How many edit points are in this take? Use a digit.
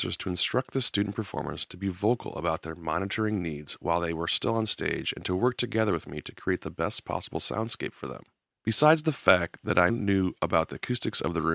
2